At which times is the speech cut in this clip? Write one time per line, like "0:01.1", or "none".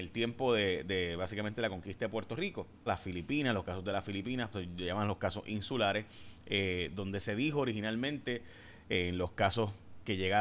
0:02.9
0:04.5